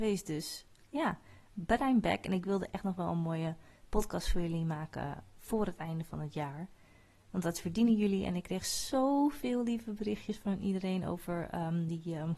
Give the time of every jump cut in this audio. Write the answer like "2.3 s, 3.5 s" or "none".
none